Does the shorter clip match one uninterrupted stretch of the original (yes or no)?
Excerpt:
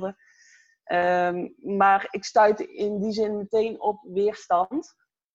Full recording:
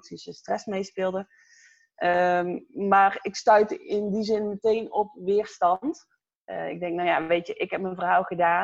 yes